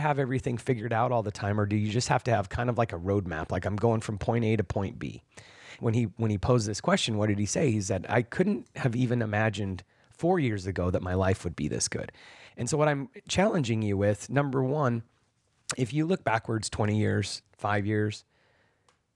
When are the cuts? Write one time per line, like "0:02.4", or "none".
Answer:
0:05.8
0:17.4